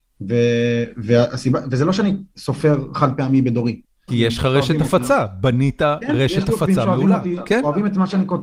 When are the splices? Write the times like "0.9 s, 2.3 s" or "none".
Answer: 4.1 s